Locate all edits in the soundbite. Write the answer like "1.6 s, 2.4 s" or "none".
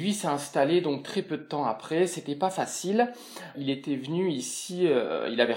3.5 s